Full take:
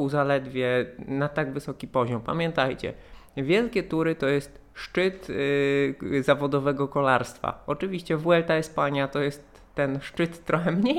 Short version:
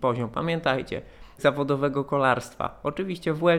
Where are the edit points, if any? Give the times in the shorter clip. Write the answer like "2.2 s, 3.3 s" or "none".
1.4 s